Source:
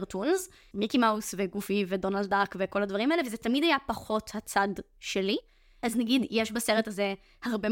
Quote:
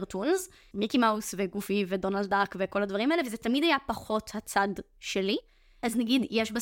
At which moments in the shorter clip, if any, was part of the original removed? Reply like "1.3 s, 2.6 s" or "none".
none